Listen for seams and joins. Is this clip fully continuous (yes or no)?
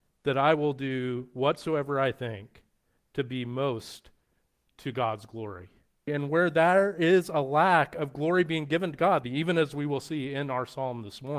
no